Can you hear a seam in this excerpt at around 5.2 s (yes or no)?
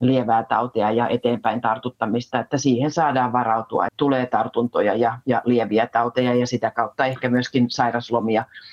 no